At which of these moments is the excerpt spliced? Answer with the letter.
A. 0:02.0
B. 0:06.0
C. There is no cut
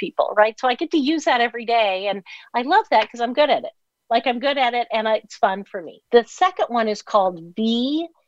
B